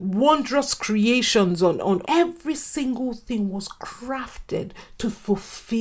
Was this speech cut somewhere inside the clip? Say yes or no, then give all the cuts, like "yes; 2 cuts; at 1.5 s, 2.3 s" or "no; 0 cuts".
yes; 1 cut; at 2.0 s